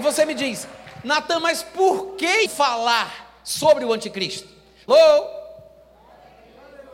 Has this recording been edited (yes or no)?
yes